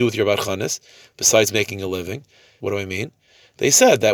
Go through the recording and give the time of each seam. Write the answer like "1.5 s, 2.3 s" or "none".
2.6 s

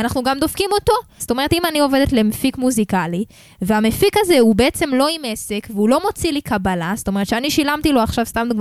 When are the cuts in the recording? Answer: 1.2 s

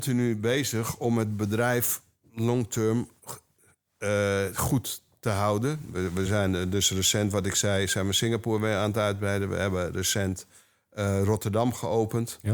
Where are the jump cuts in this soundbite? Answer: none

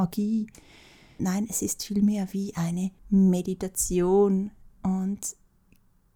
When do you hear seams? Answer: 1.2 s, 3.0 s

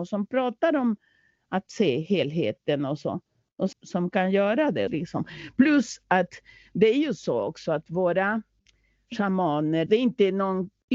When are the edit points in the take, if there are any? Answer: 3.7 s, 4.9 s, 9.9 s

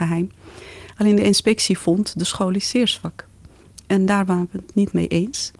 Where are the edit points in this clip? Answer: none

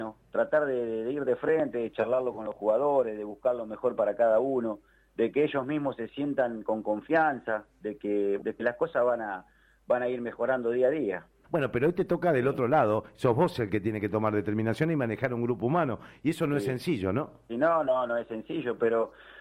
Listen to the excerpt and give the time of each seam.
8.4 s, 11.4 s, 17.5 s

